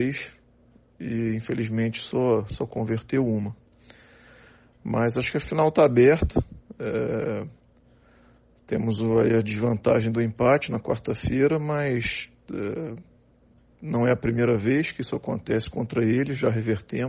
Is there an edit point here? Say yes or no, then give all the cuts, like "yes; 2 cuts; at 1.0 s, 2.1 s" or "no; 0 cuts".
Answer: no; 0 cuts